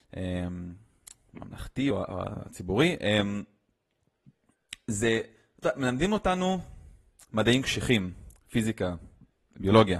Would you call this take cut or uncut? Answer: uncut